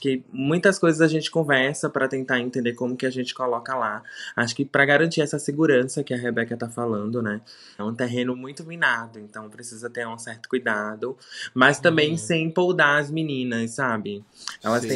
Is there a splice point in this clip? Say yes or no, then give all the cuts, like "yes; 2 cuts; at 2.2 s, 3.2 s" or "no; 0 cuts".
yes; 1 cut; at 7.8 s